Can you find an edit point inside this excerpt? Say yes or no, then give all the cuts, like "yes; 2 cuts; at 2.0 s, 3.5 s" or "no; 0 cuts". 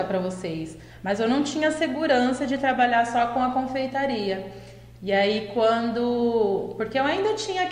no; 0 cuts